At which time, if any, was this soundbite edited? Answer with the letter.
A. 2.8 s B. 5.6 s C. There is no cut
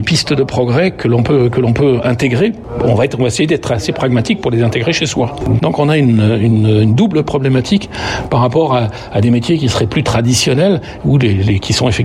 B